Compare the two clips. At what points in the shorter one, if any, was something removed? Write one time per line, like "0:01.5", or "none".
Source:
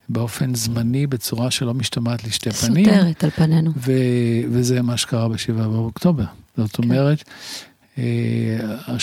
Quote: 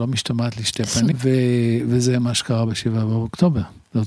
0:01.1